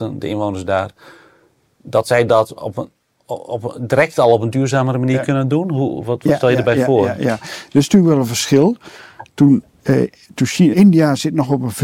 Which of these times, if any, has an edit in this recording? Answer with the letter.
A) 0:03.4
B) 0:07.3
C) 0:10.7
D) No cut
C